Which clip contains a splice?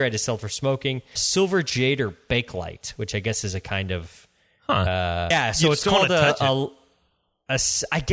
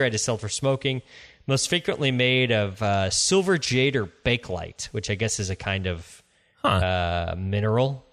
first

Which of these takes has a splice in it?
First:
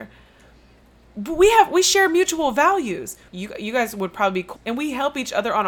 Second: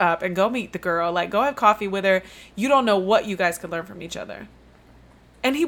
first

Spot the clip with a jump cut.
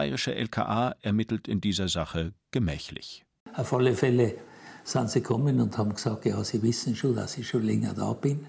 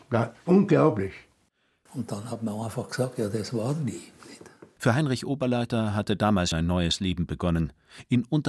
second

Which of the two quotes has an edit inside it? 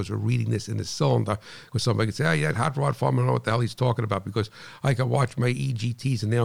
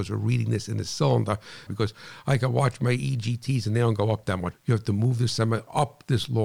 second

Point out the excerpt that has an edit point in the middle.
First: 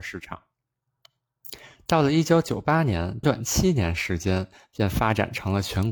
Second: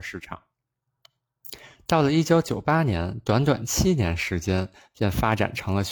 first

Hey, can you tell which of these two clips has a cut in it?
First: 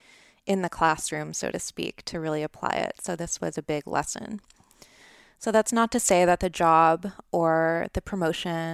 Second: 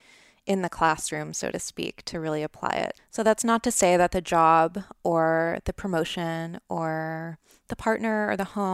second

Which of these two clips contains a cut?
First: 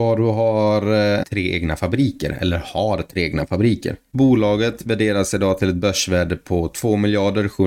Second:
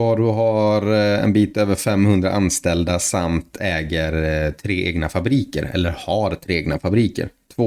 first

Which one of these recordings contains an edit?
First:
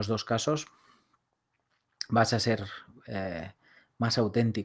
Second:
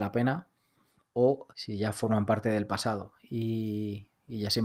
second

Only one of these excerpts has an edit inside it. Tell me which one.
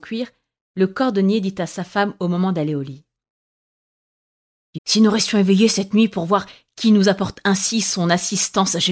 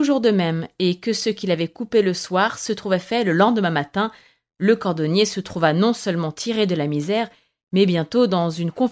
first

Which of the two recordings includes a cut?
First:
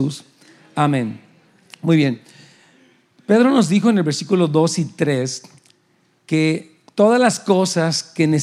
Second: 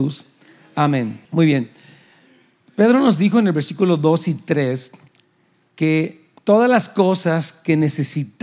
second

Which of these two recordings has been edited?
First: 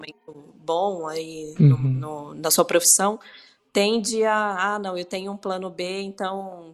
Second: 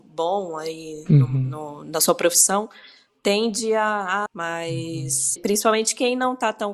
second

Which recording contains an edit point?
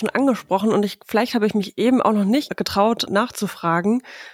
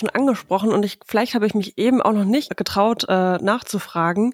first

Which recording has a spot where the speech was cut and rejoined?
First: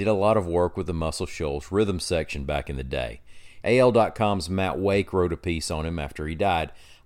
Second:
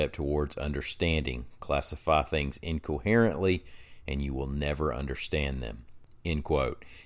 first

